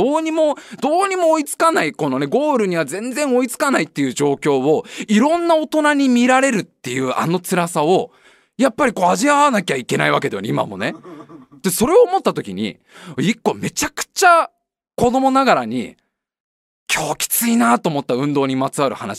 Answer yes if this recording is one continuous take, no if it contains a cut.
yes